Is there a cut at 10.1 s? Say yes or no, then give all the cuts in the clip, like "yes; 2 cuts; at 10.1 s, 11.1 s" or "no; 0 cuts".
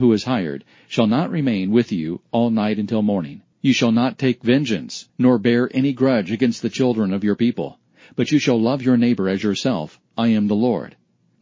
no; 2 cuts; at 3.5 s, 5.1 s